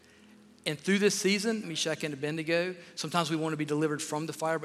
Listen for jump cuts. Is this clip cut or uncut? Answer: cut